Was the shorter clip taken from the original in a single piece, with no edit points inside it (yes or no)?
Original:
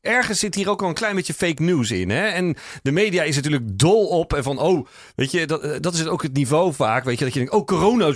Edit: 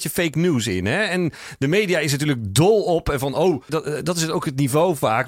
no